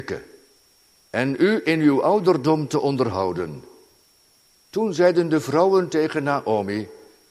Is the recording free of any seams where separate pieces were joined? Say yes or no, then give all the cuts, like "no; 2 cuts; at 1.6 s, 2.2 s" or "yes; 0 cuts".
no; 1 cut; at 4.7 s